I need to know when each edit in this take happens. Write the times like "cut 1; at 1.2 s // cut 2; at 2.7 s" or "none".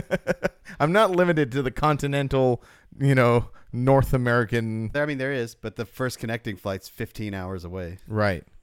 cut 1; at 4.9 s